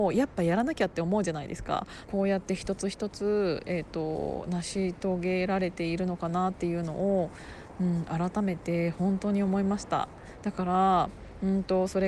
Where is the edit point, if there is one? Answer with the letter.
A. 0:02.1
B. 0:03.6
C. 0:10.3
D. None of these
A